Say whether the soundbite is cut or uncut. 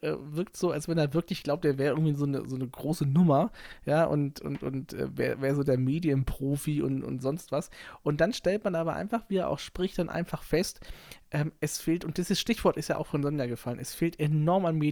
uncut